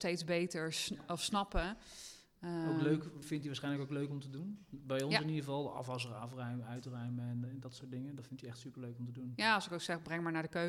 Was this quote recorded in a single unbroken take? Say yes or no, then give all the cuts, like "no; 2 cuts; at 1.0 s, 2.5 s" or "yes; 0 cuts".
no; 1 cut; at 3.2 s